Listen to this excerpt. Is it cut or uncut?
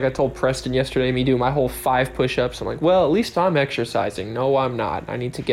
uncut